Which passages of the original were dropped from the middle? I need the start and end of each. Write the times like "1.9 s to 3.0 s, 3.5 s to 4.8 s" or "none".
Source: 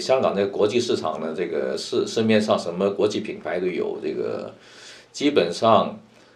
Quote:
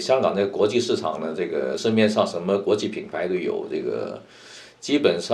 1.8 s to 2.1 s